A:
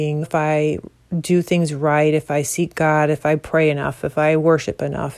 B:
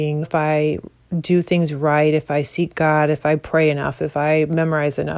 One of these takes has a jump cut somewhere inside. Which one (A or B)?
B